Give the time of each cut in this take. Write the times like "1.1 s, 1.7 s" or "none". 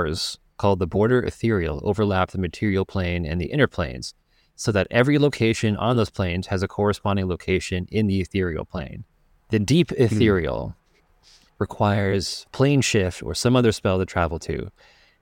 none